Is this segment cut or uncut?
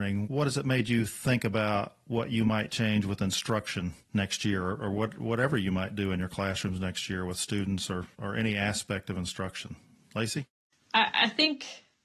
uncut